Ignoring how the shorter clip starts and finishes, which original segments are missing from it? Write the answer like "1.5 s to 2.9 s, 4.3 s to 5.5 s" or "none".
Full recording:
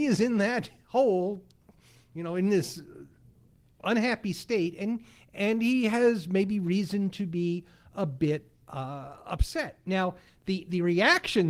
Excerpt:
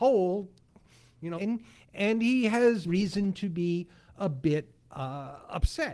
2.3 s to 4.8 s, 6.2 s to 6.6 s

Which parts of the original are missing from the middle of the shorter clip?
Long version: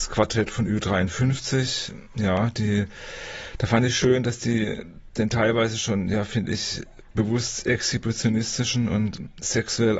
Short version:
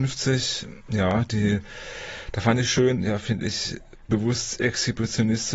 4.2 s to 6.0 s

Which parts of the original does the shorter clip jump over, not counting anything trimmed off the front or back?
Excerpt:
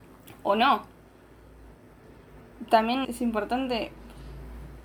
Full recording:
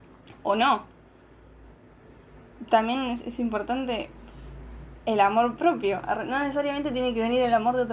3.0 s to 3.2 s

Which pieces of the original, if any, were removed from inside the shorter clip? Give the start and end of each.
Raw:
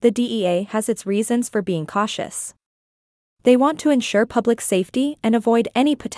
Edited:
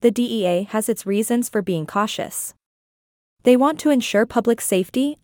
none

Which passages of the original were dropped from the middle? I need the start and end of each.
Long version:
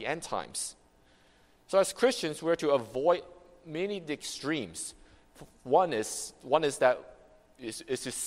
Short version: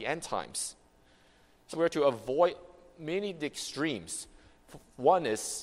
1.7 s to 2.4 s

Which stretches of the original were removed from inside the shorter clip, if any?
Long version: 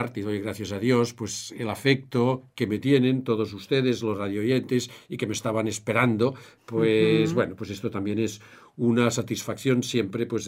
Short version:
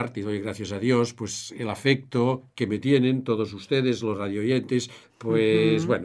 5.0 s to 6.5 s

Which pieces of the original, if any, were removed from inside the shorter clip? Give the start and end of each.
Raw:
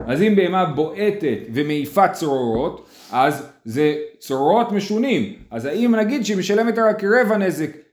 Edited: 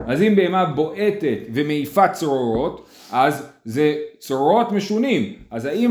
none

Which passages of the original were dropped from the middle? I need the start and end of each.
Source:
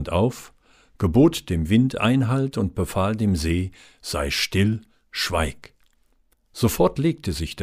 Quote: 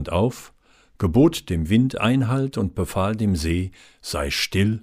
none

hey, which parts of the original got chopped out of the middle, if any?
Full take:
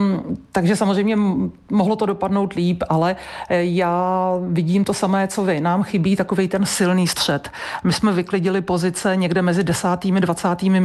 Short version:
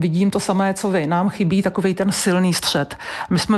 none

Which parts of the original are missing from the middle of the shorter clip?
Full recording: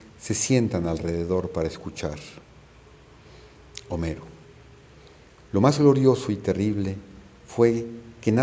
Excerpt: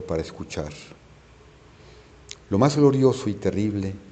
3.8 s to 5.4 s

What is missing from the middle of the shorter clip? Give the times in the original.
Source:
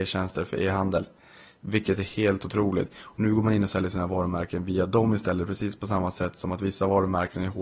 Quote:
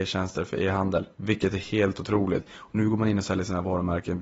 1.1 s to 1.6 s

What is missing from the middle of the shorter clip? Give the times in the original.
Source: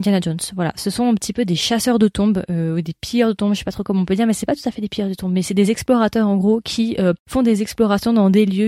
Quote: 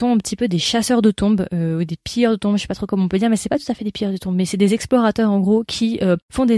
none

